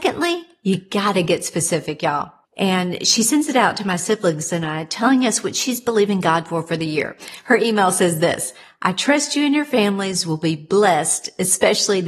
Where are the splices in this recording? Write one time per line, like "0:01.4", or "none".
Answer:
0:02.4